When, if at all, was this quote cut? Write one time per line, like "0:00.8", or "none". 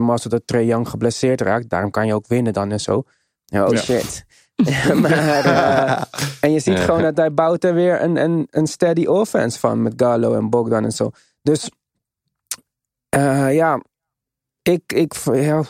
none